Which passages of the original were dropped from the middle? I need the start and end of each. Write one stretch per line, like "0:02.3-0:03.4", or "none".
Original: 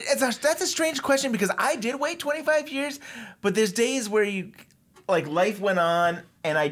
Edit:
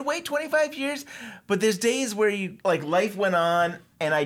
0:04.6-0:05.0